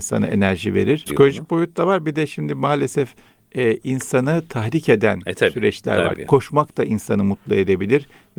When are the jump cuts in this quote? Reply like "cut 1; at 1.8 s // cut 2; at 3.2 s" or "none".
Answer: cut 1; at 1.1 s // cut 2; at 6.1 s

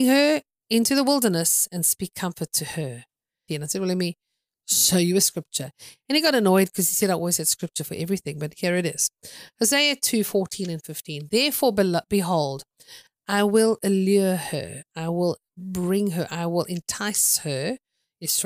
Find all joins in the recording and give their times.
cut 1; at 3.5 s

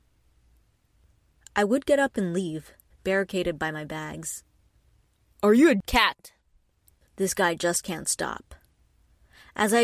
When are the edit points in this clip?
cut 1; at 2.9 s

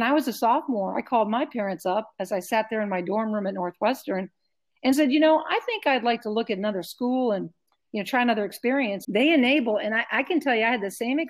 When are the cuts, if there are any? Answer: cut 1; at 9.0 s

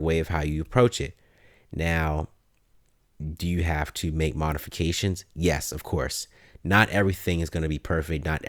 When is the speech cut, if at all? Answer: none

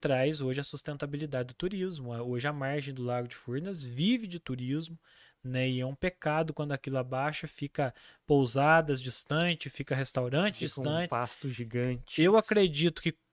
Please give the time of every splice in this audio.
cut 1; at 12.2 s

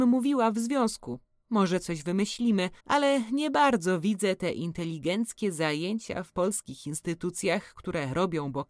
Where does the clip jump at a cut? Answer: cut 1; at 2.8 s

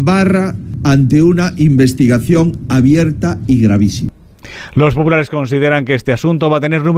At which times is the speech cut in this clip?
none

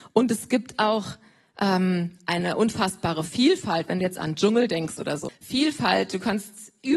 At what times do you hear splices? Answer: cut 1; at 5.3 s

